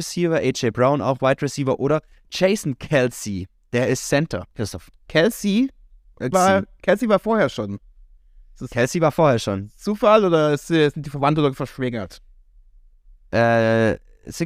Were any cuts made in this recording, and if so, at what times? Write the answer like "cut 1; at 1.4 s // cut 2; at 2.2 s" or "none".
cut 1; at 4.5 s // cut 2; at 6.3 s